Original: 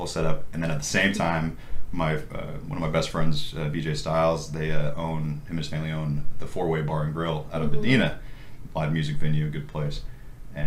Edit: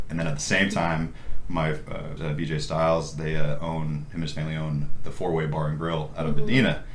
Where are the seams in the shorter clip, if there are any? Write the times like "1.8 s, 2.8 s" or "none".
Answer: 2.2 s